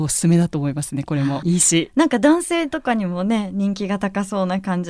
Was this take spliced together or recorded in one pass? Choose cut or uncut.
cut